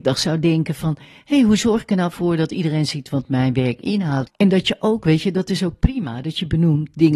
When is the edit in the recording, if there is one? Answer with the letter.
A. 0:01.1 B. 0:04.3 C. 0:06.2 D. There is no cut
B